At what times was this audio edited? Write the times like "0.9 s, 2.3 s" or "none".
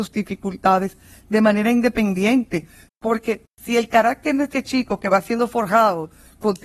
2.9 s